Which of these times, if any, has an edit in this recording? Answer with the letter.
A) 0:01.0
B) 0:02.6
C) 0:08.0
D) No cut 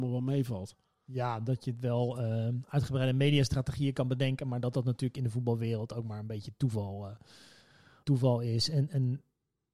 C